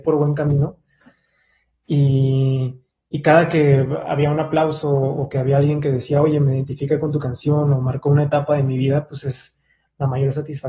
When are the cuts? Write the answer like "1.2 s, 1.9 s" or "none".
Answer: none